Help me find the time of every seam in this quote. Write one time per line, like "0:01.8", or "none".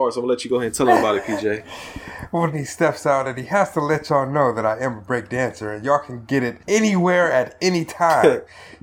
0:02.5